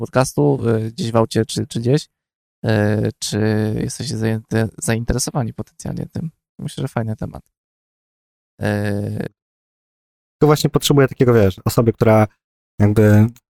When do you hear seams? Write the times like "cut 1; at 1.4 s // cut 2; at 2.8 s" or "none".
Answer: cut 1; at 9.3 s